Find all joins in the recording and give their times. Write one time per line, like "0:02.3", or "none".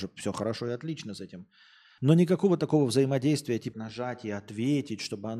0:02.0
0:03.7